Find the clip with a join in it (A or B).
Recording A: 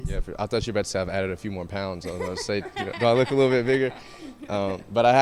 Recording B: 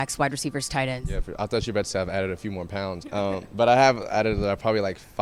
B